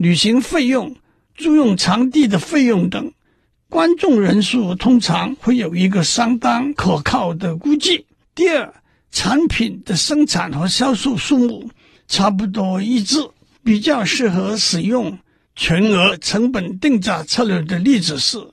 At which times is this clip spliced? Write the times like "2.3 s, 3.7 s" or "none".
8.2 s, 13.6 s